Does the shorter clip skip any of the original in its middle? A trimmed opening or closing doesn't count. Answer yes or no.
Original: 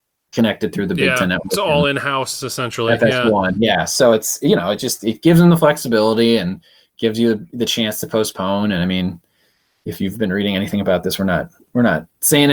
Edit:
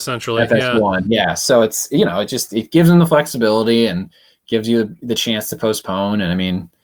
no